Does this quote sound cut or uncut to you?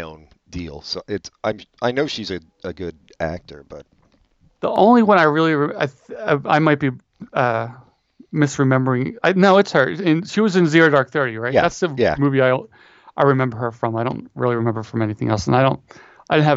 uncut